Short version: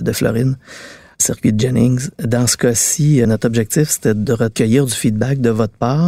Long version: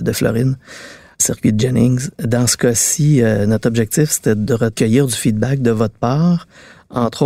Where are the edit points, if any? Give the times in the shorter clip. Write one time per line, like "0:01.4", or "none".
0:03.2